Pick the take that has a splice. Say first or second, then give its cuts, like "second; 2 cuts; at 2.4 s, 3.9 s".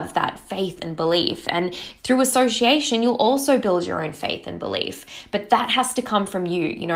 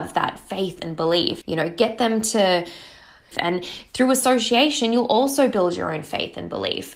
second; 2 cuts; at 1.4 s, 3.3 s